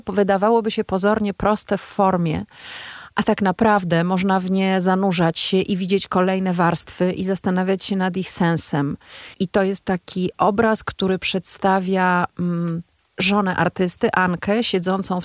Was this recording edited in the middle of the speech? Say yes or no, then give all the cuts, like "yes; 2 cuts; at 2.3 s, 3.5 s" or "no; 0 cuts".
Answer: yes; 1 cut; at 9.3 s